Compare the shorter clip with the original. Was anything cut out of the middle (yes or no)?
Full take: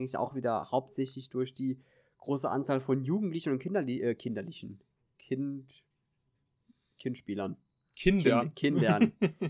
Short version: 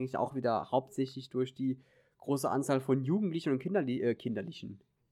no